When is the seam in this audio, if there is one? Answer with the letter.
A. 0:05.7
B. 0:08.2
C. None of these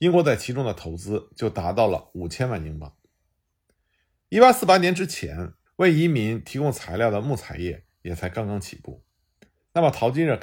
A